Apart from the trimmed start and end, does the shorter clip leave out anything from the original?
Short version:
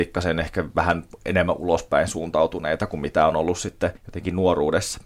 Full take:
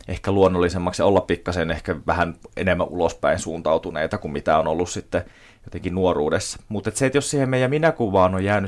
yes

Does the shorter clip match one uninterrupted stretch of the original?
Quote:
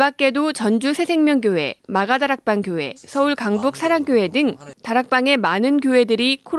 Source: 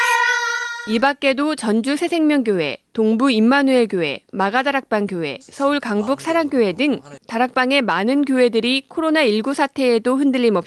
no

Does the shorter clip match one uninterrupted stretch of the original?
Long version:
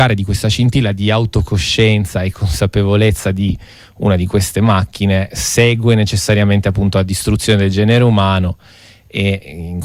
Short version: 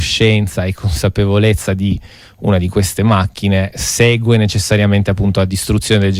yes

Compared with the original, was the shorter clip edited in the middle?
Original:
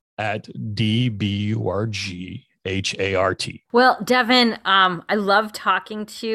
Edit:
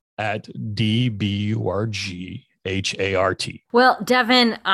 no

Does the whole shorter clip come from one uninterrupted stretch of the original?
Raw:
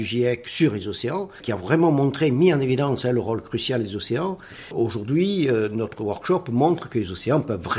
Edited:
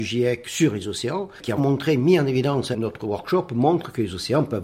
no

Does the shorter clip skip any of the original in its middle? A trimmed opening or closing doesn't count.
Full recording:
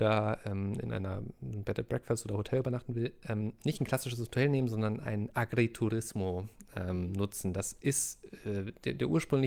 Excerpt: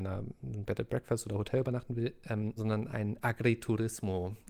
yes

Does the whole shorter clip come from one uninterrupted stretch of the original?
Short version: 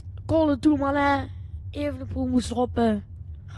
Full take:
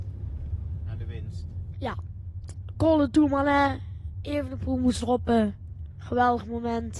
yes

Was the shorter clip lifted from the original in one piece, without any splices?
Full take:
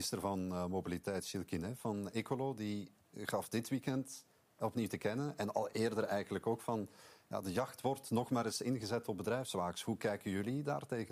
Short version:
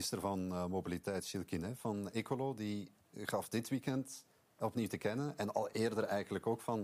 yes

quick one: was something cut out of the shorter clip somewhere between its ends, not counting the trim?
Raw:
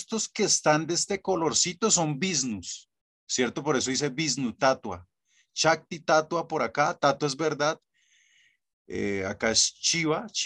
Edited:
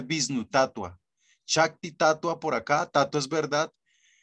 no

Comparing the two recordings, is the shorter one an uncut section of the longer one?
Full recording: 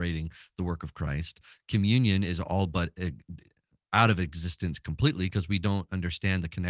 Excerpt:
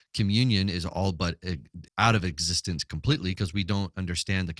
no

